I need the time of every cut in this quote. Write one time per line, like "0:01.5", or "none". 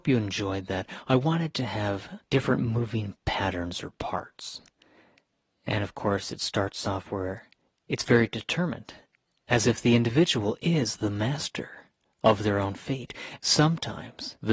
0:13.4

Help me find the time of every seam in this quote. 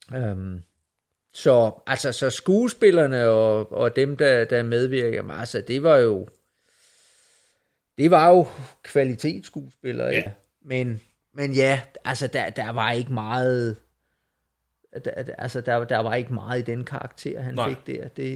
0:10.3

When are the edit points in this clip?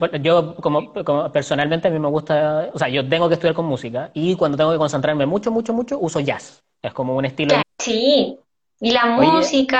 0:07.6

